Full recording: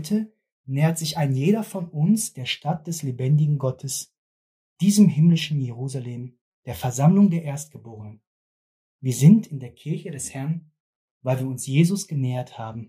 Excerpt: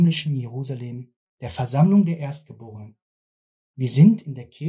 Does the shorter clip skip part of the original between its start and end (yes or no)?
no